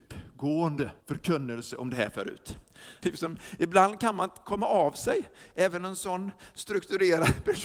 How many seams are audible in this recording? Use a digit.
2